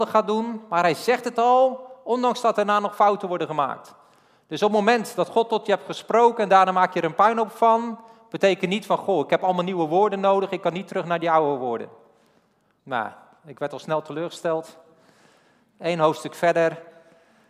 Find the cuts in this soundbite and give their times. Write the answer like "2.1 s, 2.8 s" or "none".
12.8 s